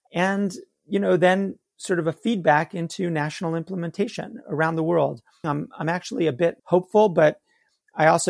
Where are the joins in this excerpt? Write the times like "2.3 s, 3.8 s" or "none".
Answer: 5.4 s, 6.6 s